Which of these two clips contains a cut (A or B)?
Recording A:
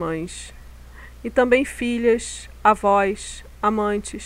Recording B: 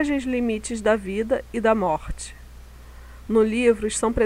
B